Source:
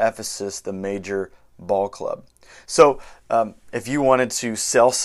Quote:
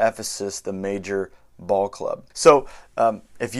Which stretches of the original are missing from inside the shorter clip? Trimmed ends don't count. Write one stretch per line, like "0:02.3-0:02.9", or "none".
0:02.3-0:02.6

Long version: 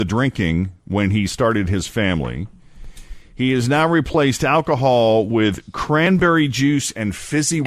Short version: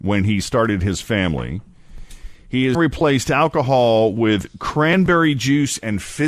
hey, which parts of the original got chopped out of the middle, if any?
0:03.6-0:03.9

